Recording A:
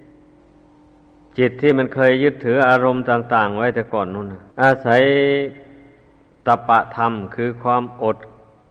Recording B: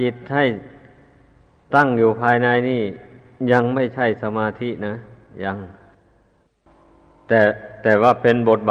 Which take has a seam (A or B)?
A